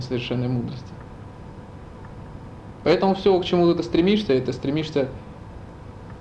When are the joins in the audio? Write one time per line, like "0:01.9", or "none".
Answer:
0:02.8

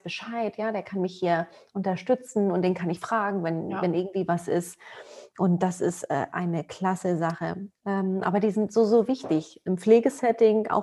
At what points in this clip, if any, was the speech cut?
0:06.3
0:07.7

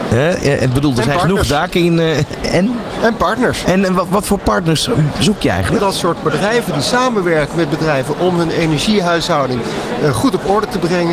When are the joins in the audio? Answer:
0:03.6
0:05.8

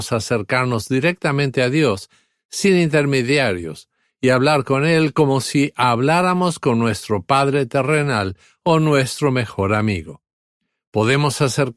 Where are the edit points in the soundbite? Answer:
none

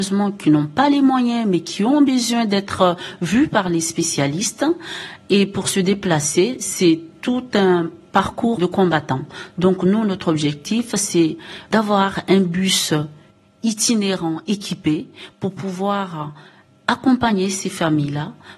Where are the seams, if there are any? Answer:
0:08.6

